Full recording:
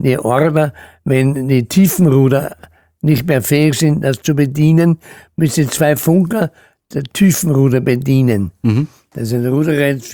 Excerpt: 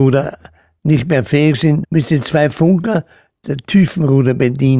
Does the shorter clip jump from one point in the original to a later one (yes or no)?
yes